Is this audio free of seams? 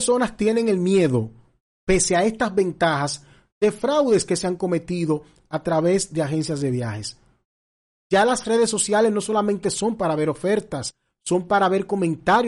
no; 1 cut; at 8.0 s

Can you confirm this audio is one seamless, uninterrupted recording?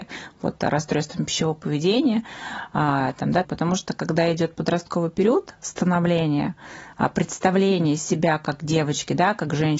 no; 1 cut; at 3.4 s

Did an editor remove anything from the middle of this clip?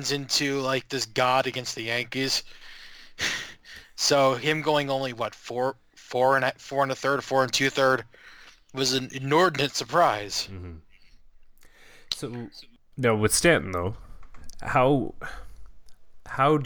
no; 0 cuts

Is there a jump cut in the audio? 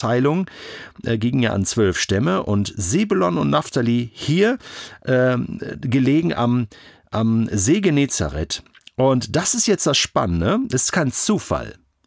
no; 0 cuts

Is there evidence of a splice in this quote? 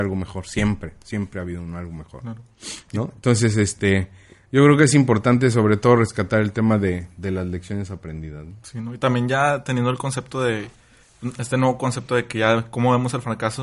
no; 0 cuts

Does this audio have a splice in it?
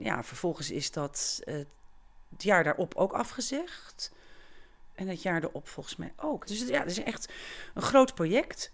yes; 2 cuts; at 2.3 s, 6.5 s

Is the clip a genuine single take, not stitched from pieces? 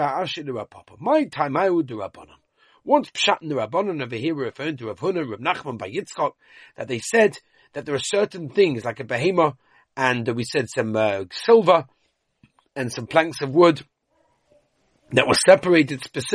yes; 0 cuts

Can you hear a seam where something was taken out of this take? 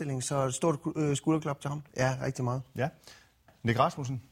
yes; 1 cut; at 1.9 s

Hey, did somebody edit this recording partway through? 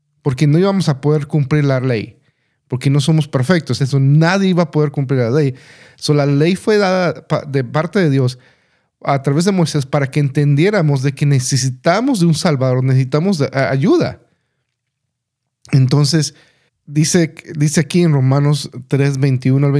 yes; 2 cuts; at 3.8 s, 16.7 s

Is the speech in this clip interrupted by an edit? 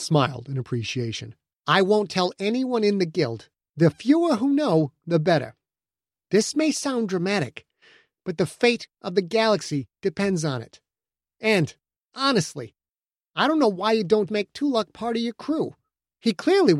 yes; 2 cuts; at 1.5 s, 14.3 s

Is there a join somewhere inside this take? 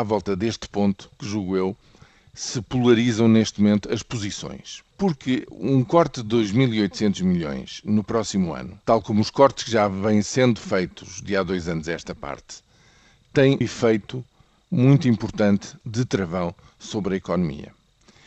yes; 3 cuts; at 4.9 s, 8.8 s, 13.6 s

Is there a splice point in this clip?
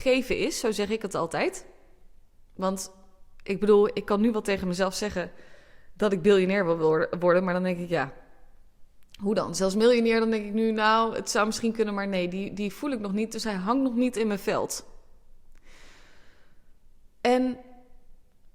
no; 0 cuts

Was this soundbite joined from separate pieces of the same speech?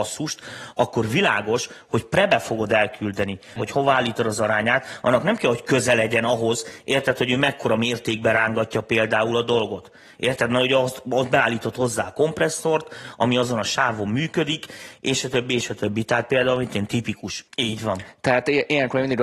yes; 2 cuts; at 3.6 s, 17.5 s

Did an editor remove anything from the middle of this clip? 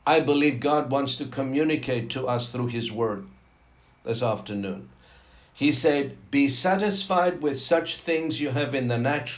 no; 0 cuts

